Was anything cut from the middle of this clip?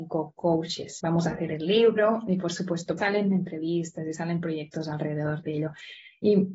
yes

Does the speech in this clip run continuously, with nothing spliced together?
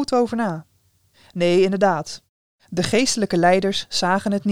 yes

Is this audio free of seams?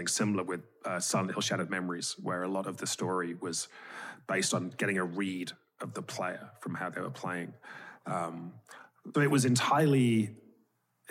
no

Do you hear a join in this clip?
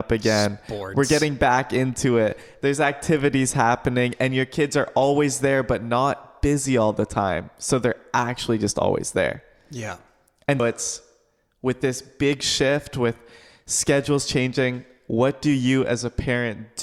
yes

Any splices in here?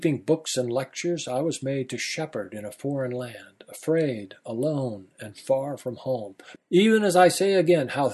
yes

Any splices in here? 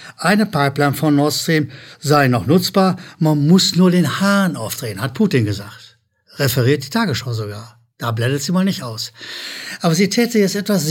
no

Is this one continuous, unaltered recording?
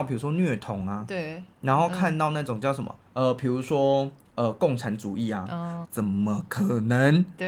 no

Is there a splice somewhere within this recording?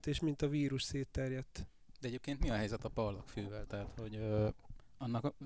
no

